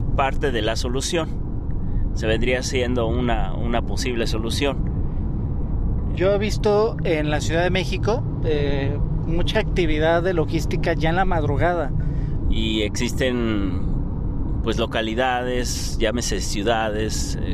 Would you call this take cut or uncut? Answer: cut